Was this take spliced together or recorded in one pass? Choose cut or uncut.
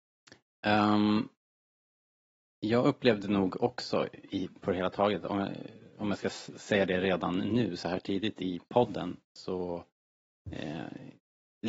uncut